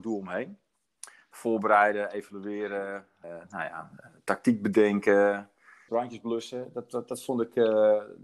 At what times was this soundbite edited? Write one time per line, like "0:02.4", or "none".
0:03.2
0:05.9